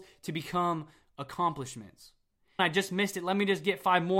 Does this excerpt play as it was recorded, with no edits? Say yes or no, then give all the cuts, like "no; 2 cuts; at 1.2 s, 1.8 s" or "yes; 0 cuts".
no; 1 cut; at 2.6 s